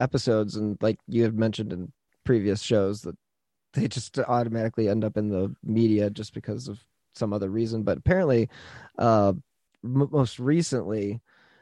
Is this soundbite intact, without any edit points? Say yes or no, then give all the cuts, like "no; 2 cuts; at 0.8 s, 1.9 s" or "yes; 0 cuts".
yes; 0 cuts